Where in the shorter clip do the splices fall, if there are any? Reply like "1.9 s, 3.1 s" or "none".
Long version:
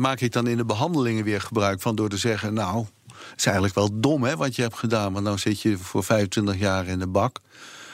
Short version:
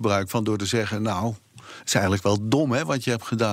none